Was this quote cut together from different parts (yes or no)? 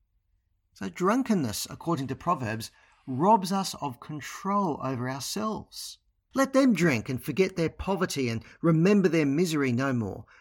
yes